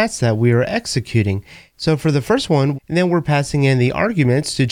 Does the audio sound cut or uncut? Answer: cut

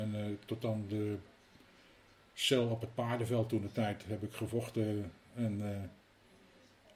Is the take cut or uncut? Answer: uncut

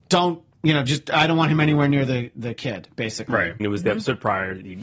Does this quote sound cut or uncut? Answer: cut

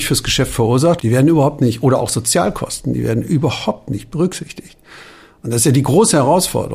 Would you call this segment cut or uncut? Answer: cut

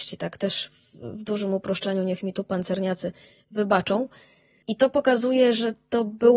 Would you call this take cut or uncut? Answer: uncut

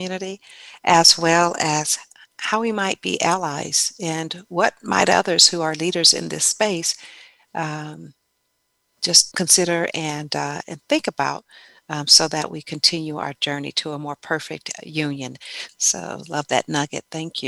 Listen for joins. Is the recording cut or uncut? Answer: cut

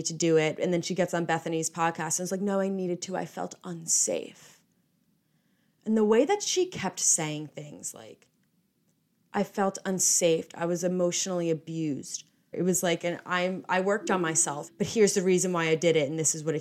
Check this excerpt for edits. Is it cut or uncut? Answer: cut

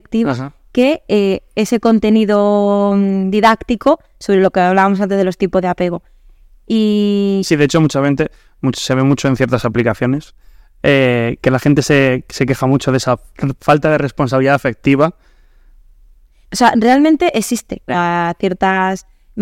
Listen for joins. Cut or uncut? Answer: cut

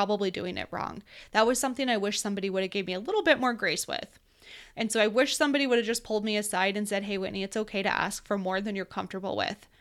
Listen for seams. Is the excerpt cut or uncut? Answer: cut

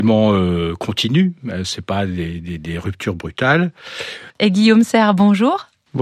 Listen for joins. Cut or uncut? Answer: cut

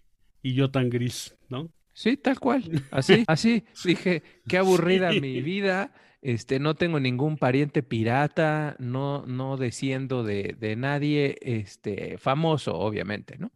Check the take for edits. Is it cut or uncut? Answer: cut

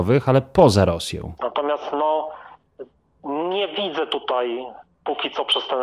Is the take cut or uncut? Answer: cut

